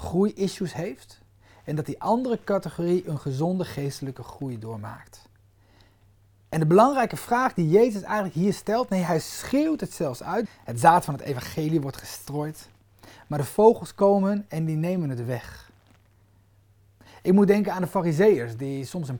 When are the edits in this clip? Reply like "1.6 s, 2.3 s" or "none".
10.4 s